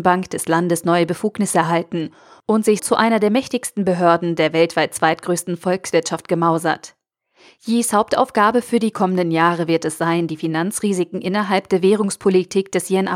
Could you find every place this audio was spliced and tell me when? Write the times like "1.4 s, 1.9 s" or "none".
2.8 s